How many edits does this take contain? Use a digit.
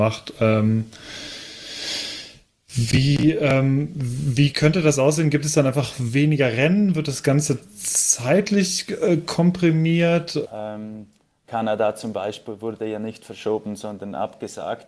1